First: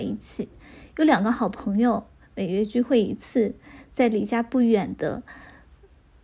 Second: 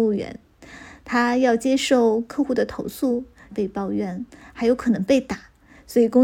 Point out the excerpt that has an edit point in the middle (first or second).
second